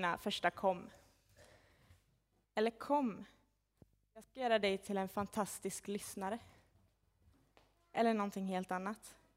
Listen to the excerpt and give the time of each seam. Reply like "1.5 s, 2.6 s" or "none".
2.4 s

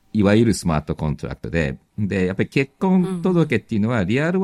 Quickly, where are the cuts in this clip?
none

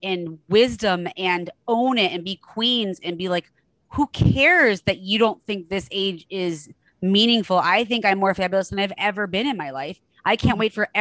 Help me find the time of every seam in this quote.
none

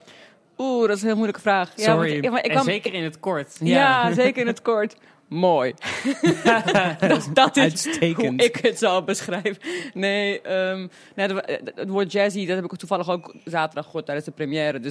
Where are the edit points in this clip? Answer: none

